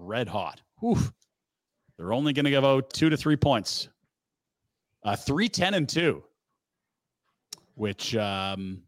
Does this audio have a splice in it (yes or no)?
yes